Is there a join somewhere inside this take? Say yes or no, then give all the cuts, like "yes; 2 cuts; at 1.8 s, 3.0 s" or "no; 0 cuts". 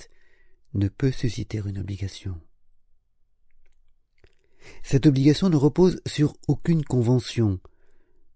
no; 0 cuts